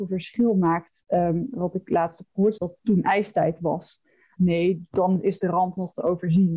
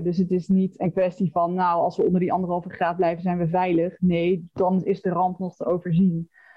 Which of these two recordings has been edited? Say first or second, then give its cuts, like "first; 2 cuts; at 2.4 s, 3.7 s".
first; 2 cuts; at 2.6 s, 4.4 s